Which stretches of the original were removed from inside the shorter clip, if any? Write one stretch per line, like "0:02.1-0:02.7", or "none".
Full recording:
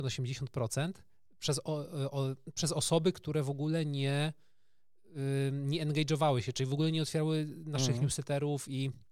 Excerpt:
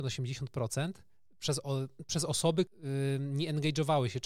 0:01.6-0:02.1
0:03.1-0:05.0